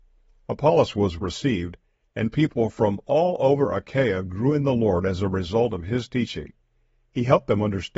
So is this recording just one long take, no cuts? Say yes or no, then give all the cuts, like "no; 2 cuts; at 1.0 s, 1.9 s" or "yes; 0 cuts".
no; 1 cut; at 1.2 s